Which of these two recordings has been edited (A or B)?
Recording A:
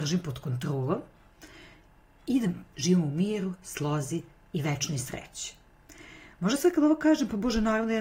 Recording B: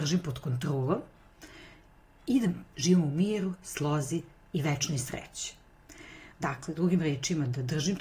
B